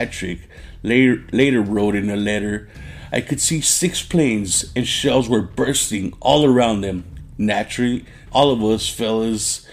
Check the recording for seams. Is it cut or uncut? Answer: cut